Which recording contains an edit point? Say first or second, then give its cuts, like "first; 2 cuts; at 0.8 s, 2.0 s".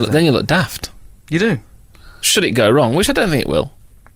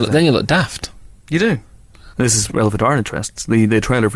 second; 1 cut; at 2.1 s